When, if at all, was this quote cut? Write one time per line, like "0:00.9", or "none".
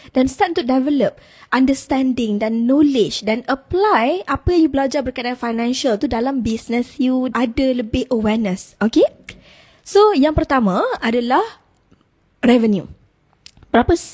0:07.3